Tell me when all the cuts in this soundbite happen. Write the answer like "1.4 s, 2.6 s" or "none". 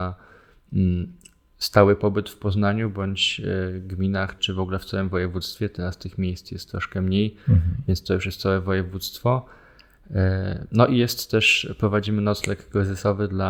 4.4 s